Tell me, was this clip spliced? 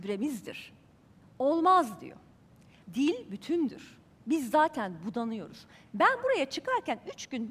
yes; 2 cuts; at 2.8 s, 4.2 s

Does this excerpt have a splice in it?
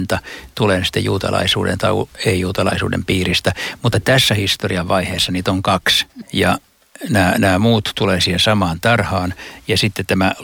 yes; 1 cut; at 6.2 s

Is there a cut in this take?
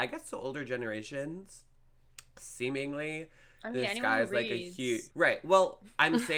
yes; 1 cut; at 5.1 s

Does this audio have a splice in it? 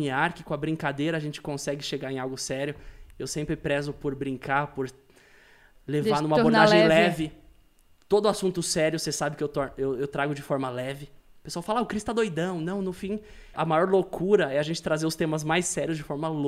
yes; 1 cut; at 13.5 s

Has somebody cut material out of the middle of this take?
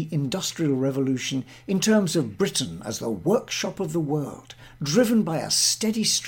no; 0 cuts

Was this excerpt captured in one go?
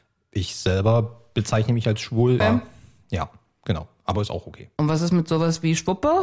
no; 1 cut; at 2.4 s

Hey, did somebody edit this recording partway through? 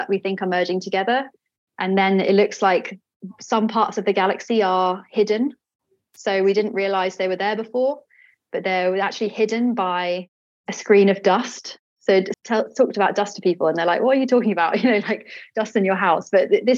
yes; 1 cut; at 12.3 s

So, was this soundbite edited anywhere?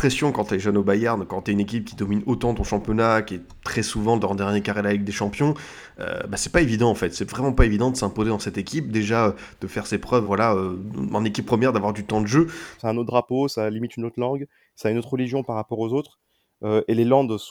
yes; 2 cuts; at 10.2 s, 12.8 s

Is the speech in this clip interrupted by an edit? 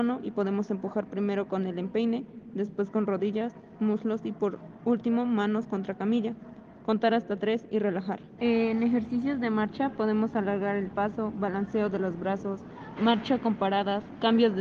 yes; 2 cuts; at 8.4 s, 13.0 s

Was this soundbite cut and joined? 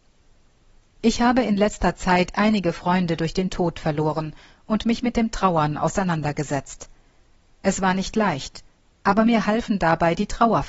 no; 0 cuts

